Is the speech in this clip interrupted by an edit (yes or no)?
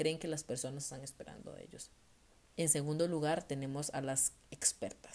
yes